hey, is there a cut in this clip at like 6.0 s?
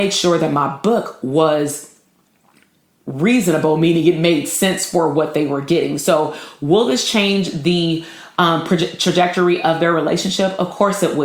no; 0 cuts

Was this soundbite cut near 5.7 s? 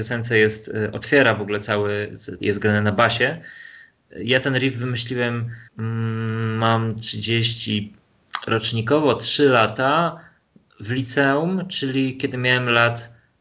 yes; 2 cuts; at 2.4 s, 5.7 s

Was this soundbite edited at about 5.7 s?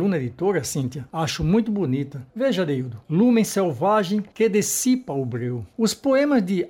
no; 2 cuts; at 1.1 s, 3.0 s

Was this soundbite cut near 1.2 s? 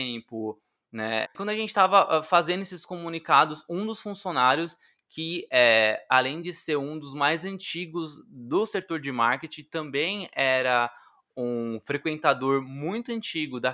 yes; 1 cut; at 1.2 s

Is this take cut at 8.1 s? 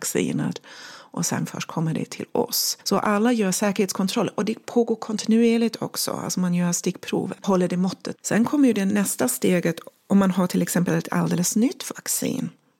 yes; 1 cut; at 8.1 s

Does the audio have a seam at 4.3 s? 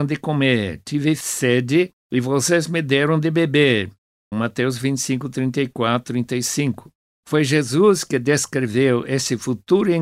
yes; 2 cuts; at 4.3 s, 7.1 s

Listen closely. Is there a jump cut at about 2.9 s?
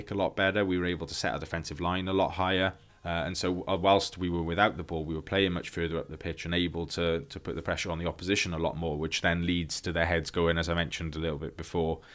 yes; 1 cut; at 2.9 s

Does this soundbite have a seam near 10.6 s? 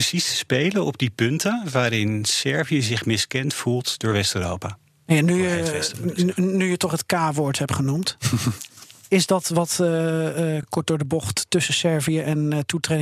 no; 0 cuts

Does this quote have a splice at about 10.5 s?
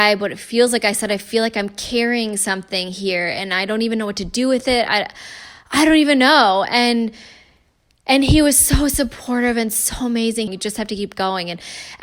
yes; 1 cut; at 10.5 s

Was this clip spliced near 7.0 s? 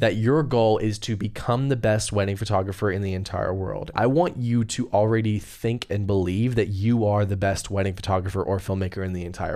no; 1 cut; at 3.9 s

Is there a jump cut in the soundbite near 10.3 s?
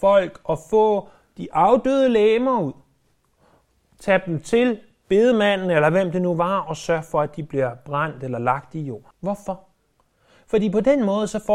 no; 1 cut; at 9.1 s

